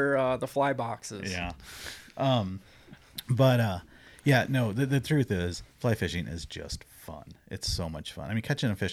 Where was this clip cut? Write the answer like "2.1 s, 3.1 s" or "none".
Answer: none